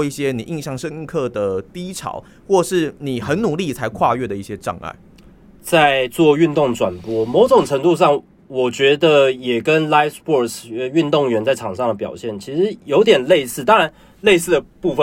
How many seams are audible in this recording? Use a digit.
1